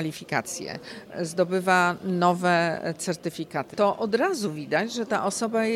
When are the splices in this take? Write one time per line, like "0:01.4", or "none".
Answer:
0:03.7